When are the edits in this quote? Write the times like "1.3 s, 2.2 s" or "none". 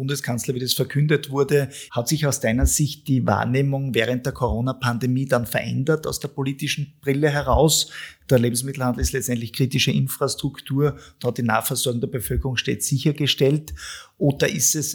1.9 s